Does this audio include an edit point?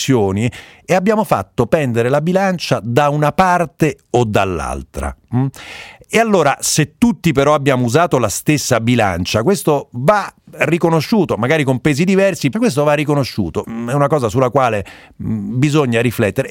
yes; 2 cuts; at 12.5 s, 13.6 s

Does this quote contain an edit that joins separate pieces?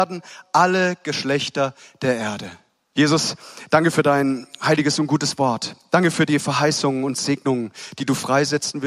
yes; 1 cut; at 2.9 s

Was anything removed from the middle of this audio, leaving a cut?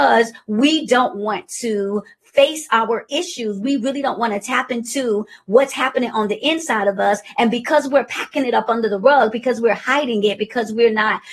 no; 0 cuts

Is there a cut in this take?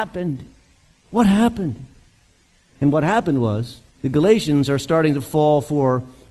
yes; 2 cuts; at 1.0 s, 3.9 s

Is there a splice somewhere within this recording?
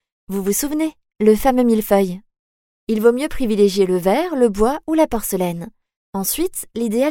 no; 0 cuts

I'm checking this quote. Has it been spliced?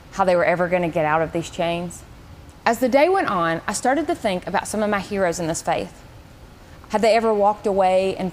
yes; 2 cuts; at 2.6 s, 6.8 s

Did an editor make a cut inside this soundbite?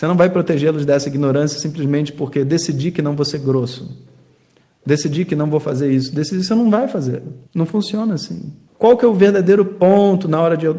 yes; 2 cuts; at 7.5 s, 8.7 s

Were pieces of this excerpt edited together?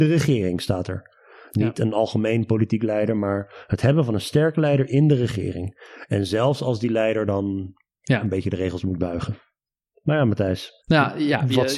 yes; 1 cut; at 10.8 s

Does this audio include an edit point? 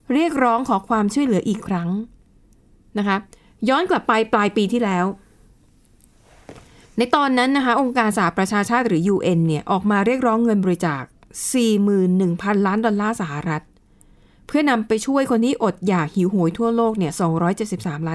no; 0 cuts

